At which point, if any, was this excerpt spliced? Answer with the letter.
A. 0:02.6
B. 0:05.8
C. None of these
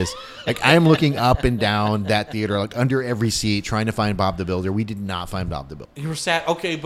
B